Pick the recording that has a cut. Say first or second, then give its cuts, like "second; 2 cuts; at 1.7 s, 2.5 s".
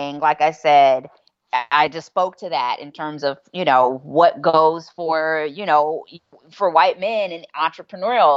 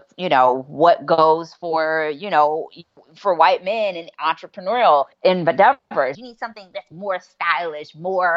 second; 2 cuts; at 5.1 s, 6.1 s